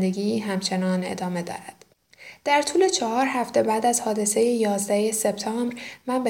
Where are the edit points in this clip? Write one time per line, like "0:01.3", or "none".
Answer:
none